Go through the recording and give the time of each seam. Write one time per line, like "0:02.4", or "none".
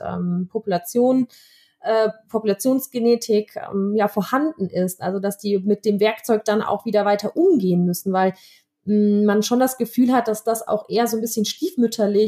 none

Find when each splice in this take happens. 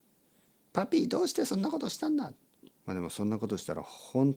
0:02.7

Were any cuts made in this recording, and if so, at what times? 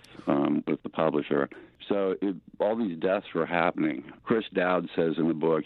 none

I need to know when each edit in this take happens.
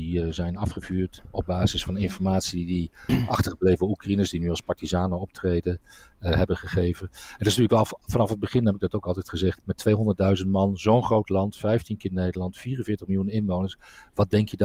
0:09.6

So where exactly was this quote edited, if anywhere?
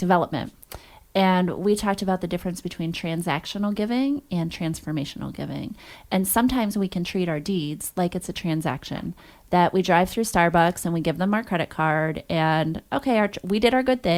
none

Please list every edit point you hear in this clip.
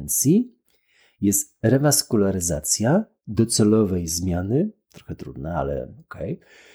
none

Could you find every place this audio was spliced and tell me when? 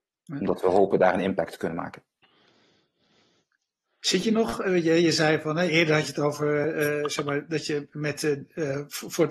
none

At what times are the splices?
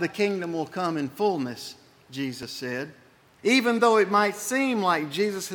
0:03.4

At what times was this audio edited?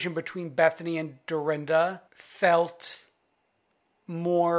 0:02.1

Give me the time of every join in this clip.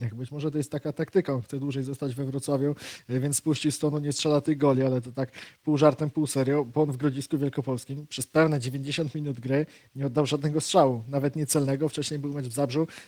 none

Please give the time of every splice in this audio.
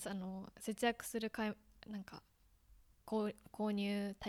none

